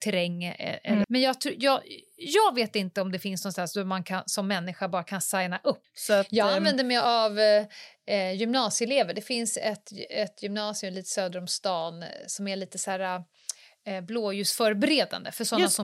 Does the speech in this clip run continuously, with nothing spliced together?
no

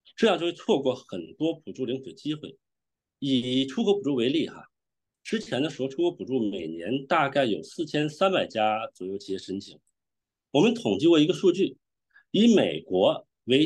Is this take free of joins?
yes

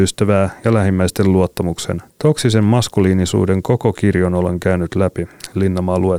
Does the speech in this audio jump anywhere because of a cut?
no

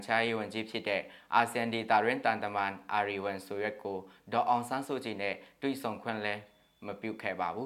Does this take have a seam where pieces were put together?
no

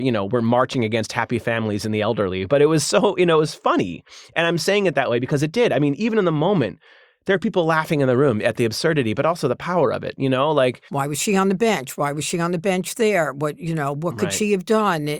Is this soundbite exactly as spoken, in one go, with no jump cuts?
no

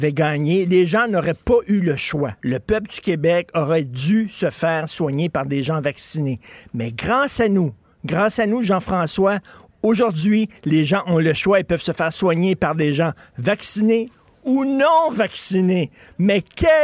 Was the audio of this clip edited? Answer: no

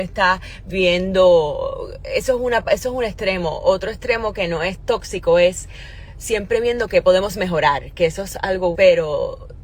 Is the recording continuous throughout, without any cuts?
no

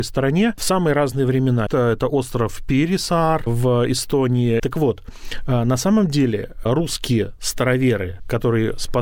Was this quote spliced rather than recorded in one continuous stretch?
yes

